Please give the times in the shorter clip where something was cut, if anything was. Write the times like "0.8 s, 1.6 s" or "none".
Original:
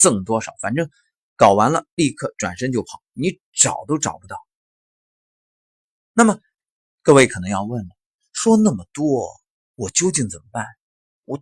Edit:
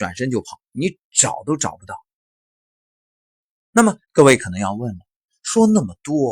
4.0 s